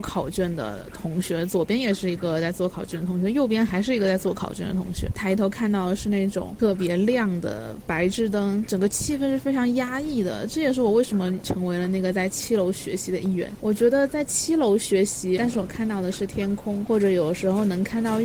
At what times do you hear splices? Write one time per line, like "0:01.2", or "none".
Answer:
0:15.4